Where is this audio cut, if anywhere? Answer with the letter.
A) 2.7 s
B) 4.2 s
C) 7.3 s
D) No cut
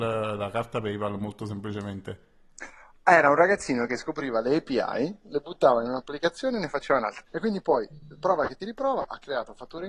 C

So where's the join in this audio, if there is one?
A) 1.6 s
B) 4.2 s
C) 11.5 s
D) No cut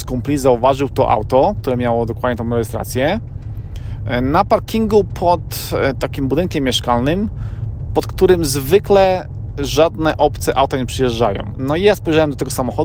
C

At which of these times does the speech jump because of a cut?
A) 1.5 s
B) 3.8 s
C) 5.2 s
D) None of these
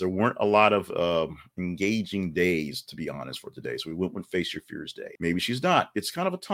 C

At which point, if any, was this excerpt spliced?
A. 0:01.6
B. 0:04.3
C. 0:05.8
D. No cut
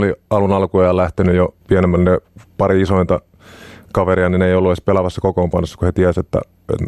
A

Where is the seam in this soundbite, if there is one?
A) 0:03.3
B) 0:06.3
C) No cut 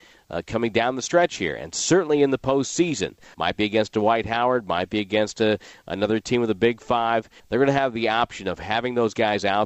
A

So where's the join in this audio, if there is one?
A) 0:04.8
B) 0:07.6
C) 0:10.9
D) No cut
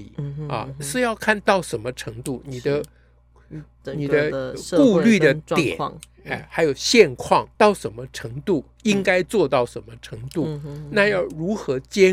B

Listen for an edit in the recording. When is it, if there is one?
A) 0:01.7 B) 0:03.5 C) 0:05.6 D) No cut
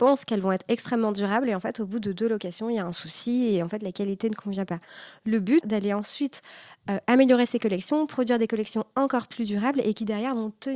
C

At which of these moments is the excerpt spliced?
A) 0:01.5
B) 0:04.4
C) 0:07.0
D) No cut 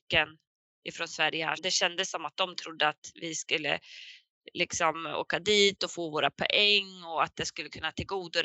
A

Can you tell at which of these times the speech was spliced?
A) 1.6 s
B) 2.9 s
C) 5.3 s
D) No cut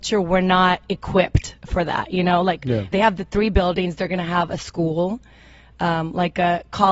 B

